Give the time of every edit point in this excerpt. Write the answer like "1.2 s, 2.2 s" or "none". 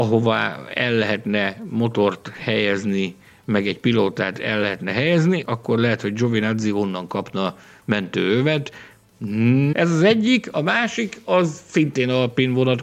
5.4 s, 9.7 s